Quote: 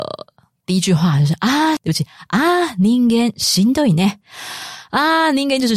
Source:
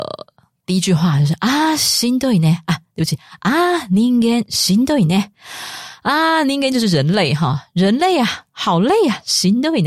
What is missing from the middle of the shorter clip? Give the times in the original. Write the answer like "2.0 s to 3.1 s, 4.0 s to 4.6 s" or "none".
1.8 s to 2.9 s